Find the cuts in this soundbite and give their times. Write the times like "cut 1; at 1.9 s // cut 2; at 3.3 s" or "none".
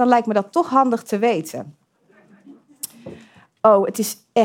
none